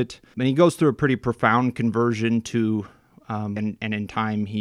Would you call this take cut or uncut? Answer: cut